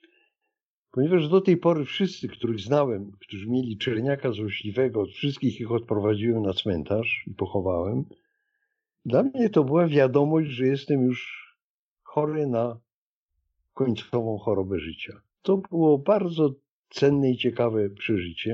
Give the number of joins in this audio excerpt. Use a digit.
1